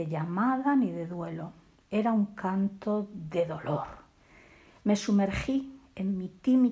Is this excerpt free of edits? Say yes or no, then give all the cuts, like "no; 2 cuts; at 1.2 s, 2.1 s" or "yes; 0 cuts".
yes; 0 cuts